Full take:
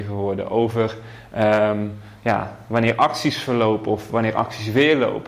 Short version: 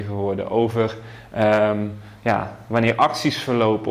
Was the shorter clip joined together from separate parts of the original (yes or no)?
no